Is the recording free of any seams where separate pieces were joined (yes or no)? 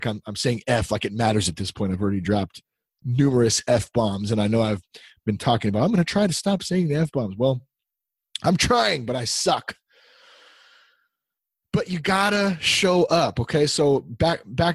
yes